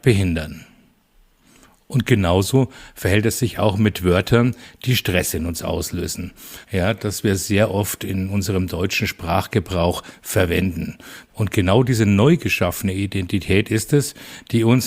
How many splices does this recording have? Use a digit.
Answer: 2